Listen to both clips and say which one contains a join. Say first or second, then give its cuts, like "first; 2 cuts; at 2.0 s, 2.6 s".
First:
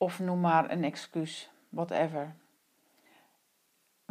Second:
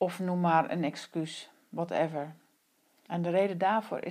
second; 1 cut; at 3.1 s